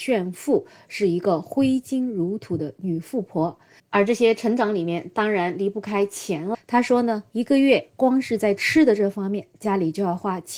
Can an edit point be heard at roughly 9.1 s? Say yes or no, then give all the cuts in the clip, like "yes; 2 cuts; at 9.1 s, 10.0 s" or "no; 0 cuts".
no; 2 cuts; at 3.8 s, 6.5 s